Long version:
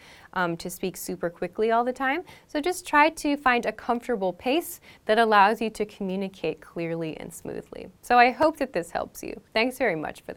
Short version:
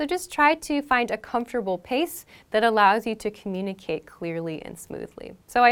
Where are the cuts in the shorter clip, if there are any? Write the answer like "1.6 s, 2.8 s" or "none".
none